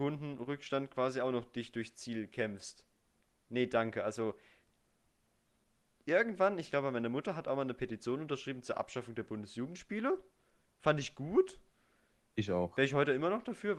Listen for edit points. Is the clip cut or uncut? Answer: uncut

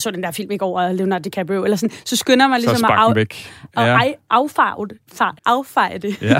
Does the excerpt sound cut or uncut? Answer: cut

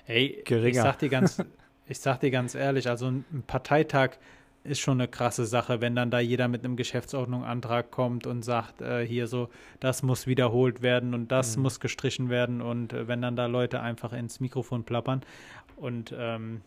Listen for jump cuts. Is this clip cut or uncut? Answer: cut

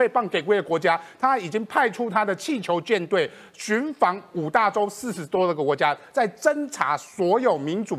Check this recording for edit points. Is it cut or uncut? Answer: uncut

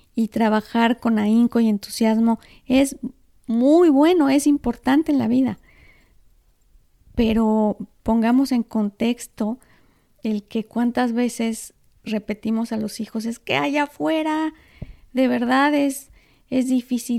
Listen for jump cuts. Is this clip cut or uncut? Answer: uncut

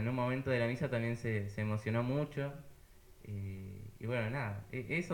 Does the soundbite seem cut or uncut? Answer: cut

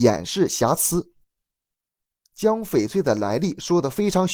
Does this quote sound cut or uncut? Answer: cut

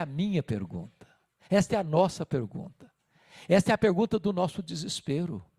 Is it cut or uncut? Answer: uncut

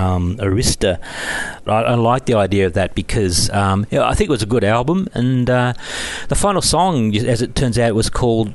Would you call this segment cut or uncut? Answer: cut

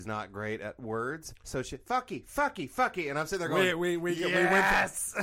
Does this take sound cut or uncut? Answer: cut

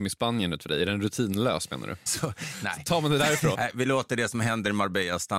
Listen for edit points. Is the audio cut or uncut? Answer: cut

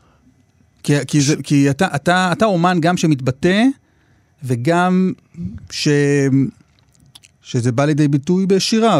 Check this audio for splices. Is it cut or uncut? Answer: uncut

